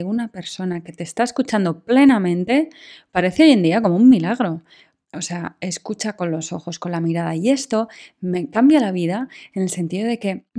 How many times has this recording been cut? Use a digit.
1